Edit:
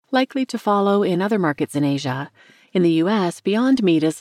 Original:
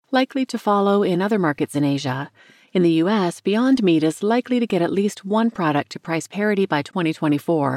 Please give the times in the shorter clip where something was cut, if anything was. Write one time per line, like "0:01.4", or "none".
none